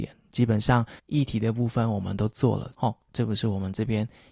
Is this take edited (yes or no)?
yes